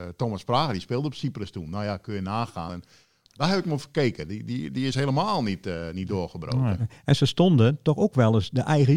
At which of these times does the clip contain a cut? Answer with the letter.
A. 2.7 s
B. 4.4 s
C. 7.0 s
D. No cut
A